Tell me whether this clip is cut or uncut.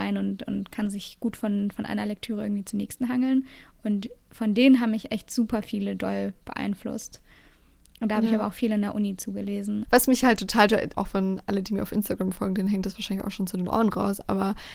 cut